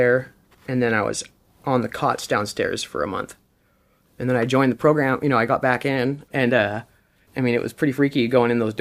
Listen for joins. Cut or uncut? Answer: cut